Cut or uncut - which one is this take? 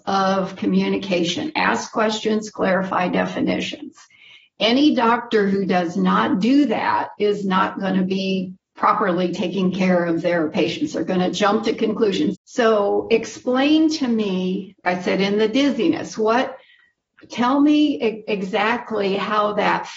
cut